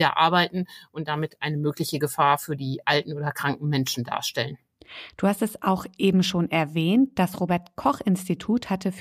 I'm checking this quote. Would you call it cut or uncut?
uncut